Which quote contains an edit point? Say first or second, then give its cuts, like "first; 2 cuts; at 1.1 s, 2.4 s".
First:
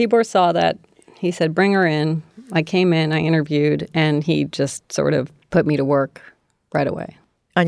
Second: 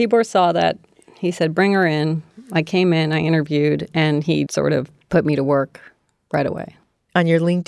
second; 1 cut; at 4.5 s